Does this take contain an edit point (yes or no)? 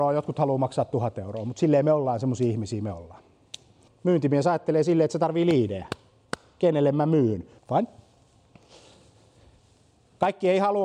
yes